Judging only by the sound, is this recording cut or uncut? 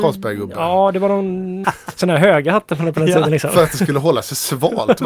cut